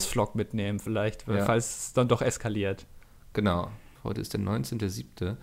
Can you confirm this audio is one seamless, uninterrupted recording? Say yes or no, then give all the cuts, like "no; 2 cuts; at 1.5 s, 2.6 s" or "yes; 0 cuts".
no; 1 cut; at 4.0 s